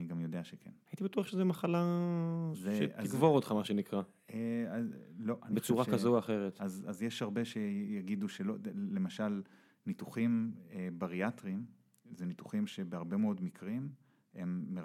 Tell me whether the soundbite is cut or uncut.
uncut